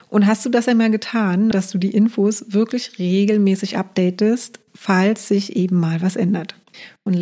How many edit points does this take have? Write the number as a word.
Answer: one